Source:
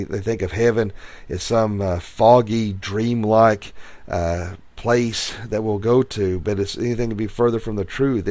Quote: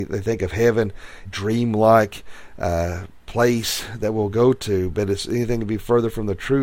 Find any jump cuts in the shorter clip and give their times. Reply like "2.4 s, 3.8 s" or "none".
1.2 s